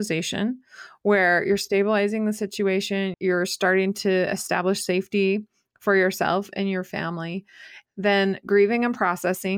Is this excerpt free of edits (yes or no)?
yes